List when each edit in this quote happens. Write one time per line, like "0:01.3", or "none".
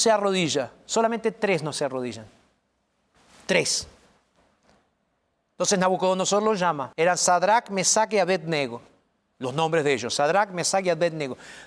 0:06.9

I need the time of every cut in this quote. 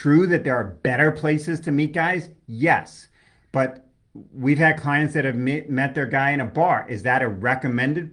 none

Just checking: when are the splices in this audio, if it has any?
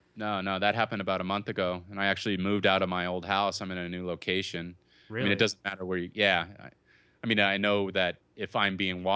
none

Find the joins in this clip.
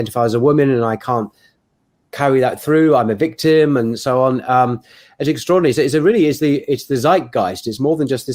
none

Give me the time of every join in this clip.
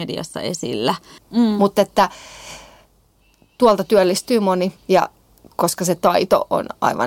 0:01.2

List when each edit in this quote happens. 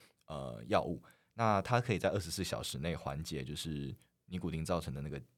none

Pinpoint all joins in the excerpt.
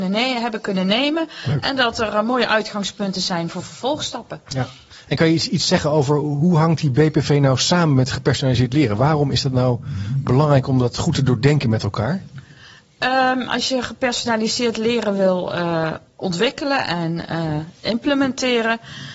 none

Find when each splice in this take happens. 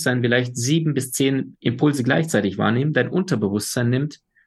none

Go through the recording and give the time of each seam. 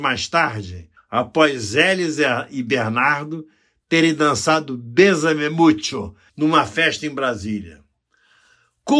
0:01.0
0:06.3

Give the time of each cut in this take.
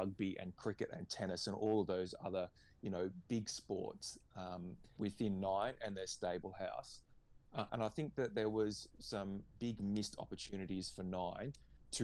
0:05.0
0:07.7

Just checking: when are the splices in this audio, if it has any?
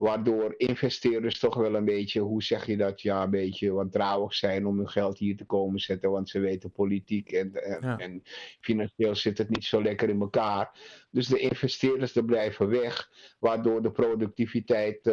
none

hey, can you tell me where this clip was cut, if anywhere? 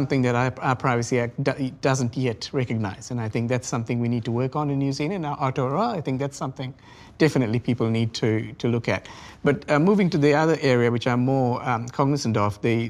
none

